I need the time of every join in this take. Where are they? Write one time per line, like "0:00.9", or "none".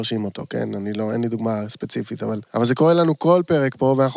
0:02.5